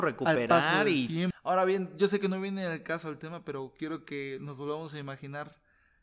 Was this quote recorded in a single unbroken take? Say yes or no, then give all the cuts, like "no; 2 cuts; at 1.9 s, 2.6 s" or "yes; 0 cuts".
no; 1 cut; at 1.3 s